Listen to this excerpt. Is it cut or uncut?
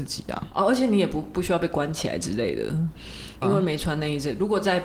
cut